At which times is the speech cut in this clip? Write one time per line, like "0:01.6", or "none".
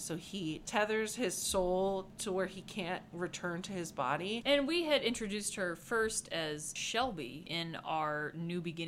0:04.4